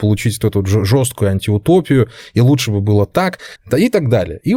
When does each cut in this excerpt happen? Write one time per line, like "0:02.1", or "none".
0:03.6